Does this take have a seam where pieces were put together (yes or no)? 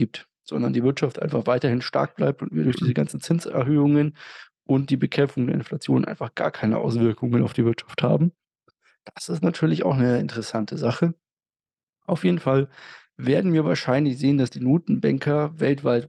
no